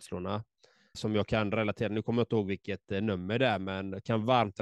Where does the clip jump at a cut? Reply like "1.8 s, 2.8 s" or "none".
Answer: 0.9 s